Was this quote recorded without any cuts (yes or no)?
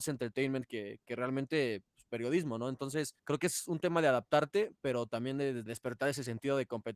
no